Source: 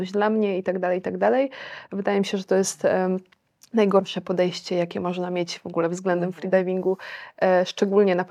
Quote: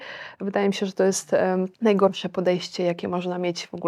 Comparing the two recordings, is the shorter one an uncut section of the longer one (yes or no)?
no